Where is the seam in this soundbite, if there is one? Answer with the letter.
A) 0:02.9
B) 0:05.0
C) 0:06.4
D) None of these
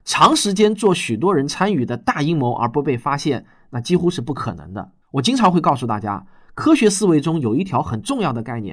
B